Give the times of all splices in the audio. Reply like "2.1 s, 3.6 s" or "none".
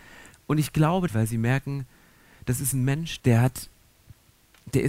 1.1 s, 3.2 s